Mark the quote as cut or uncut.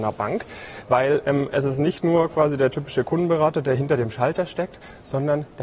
uncut